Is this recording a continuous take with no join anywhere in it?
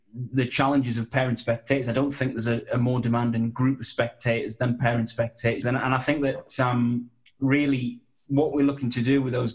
no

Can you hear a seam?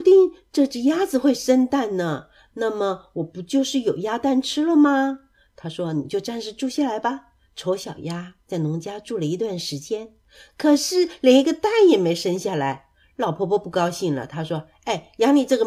no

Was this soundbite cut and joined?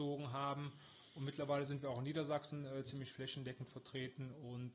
no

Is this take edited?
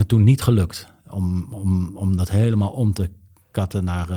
no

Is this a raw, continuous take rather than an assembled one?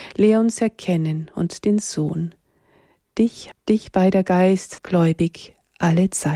no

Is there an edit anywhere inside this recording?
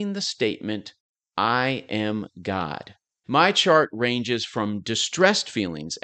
yes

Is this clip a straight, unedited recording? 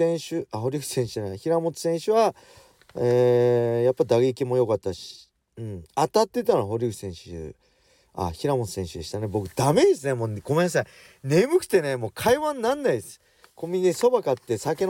no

